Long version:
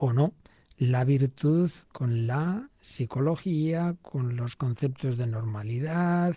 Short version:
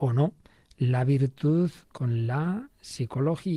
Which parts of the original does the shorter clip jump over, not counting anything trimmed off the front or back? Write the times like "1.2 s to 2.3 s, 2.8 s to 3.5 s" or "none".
none